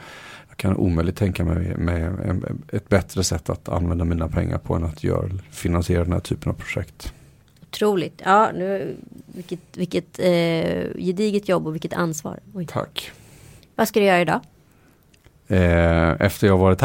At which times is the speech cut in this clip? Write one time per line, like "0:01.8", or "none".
none